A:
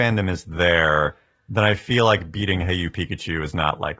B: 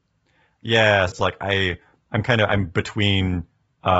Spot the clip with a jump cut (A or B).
B